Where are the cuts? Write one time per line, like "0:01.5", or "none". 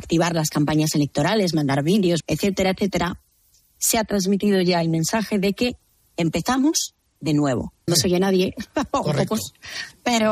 0:02.2
0:07.9